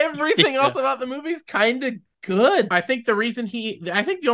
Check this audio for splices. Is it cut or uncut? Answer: cut